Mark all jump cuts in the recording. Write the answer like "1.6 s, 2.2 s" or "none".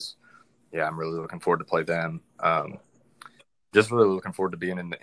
none